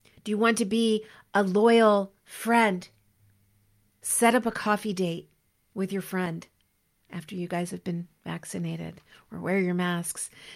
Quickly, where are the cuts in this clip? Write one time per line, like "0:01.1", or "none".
none